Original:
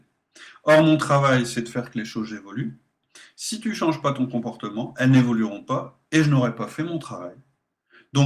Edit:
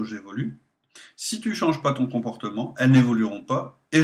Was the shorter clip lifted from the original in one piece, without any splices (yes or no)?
yes